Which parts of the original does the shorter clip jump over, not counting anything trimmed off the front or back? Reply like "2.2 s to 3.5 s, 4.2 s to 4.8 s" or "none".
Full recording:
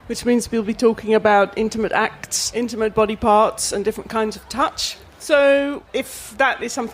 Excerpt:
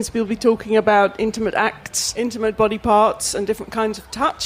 none